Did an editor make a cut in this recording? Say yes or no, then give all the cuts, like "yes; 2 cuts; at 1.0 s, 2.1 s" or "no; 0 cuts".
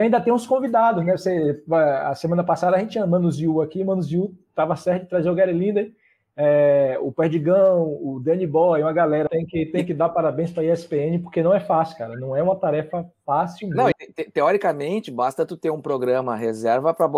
yes; 2 cuts; at 9.3 s, 13.9 s